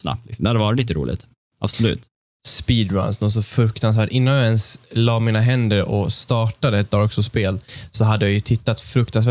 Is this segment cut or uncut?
cut